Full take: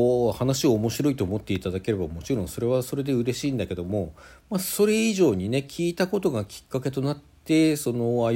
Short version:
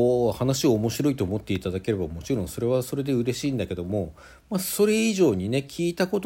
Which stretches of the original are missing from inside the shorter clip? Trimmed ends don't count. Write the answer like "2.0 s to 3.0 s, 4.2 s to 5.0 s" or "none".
none